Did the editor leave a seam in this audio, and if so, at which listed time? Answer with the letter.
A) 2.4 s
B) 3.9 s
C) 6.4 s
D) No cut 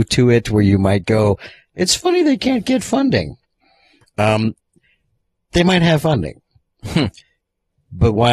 D